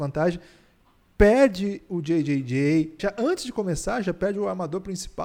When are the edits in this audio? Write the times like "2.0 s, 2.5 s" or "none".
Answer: 3.0 s

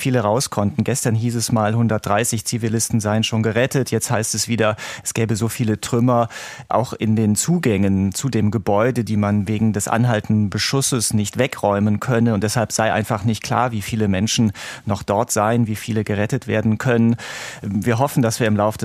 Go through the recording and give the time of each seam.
none

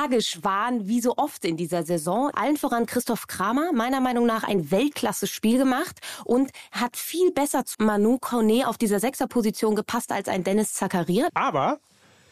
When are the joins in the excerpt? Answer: 2.3 s, 7.7 s, 11.3 s

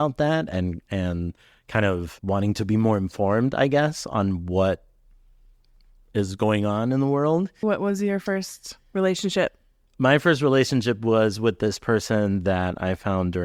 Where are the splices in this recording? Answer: 7.6 s

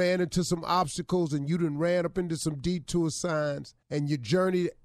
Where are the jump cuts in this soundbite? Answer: 3.8 s

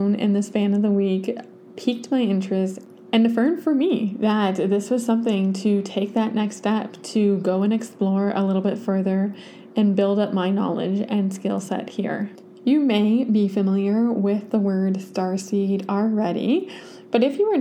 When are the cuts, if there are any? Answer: none

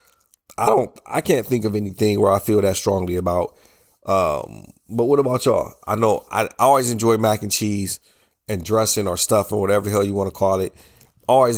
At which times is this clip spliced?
none

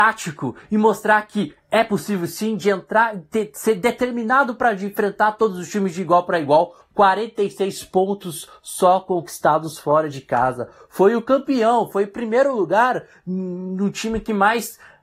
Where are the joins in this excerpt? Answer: 6.8 s

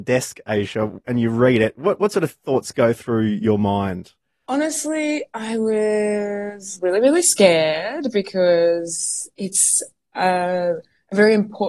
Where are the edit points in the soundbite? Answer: none

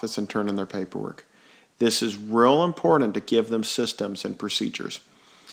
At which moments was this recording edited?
none

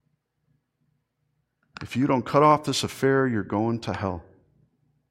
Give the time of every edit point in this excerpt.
none

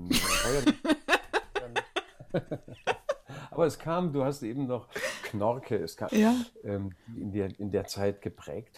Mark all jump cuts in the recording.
6.1 s, 7.2 s

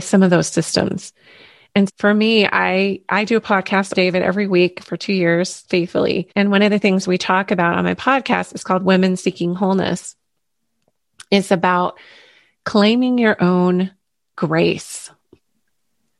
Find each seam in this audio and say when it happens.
1.9 s, 3.9 s, 6.3 s

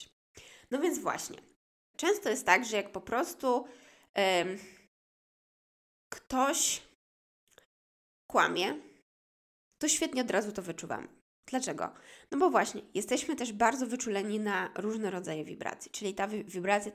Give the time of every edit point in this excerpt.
1.9 s

